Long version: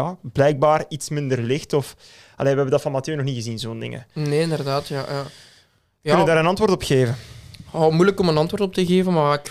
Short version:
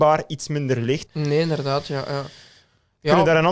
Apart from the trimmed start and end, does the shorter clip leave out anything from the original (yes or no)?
yes